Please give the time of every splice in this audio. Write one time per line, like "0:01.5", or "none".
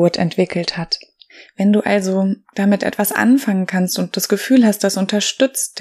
none